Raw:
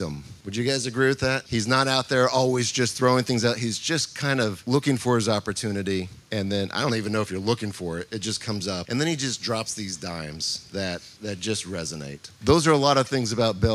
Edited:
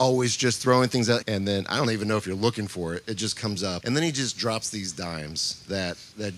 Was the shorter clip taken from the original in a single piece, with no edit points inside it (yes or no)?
no